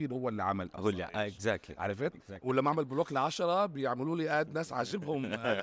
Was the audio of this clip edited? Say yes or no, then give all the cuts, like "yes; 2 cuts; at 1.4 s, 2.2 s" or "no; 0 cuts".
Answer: yes; 1 cut; at 2.4 s